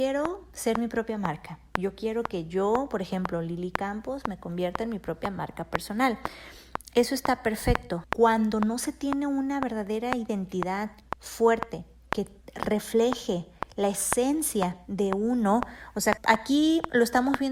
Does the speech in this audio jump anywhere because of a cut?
yes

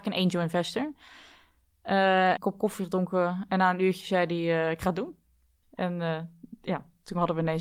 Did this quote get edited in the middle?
yes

